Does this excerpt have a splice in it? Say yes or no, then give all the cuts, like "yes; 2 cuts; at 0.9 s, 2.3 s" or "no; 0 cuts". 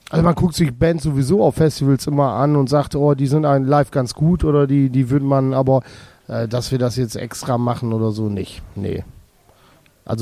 no; 0 cuts